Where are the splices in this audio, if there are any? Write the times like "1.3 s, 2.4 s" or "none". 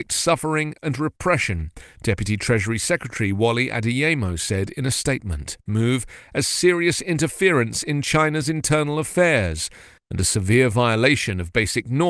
5.7 s

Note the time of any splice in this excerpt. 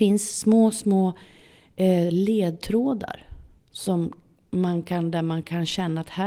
none

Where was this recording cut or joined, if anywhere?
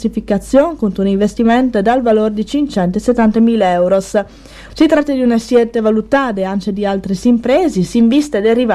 4.7 s

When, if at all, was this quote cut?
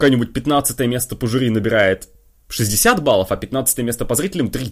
none

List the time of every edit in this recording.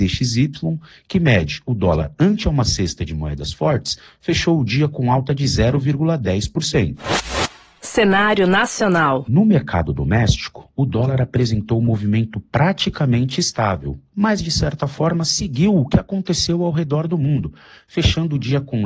none

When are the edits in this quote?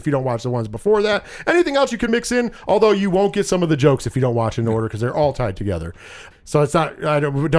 2.1 s, 6.3 s

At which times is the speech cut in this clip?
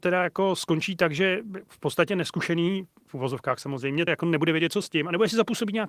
4.1 s

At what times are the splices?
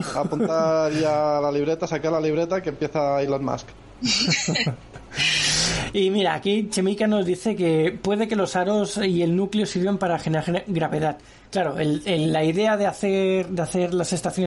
none

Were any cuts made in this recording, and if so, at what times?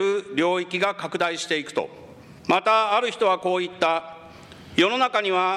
2.4 s

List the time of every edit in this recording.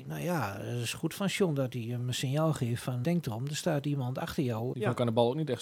3.0 s, 4.7 s

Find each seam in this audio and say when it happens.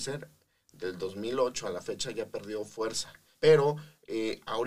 3.3 s

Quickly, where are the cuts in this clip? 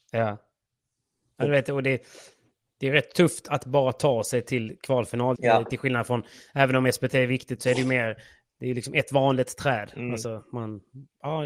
5.4 s

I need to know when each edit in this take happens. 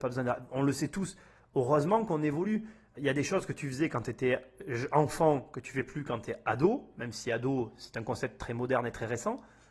3.0 s

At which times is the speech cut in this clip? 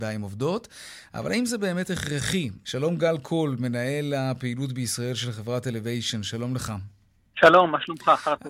2.6 s

